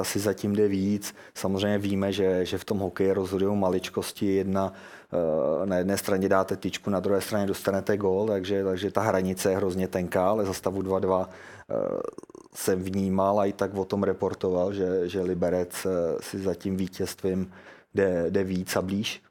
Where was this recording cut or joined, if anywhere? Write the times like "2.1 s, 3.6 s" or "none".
none